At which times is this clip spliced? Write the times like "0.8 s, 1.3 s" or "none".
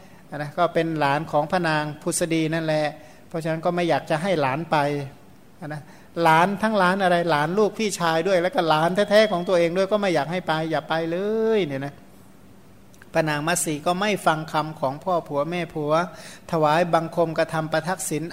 none